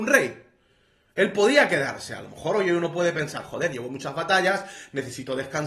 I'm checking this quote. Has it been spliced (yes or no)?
no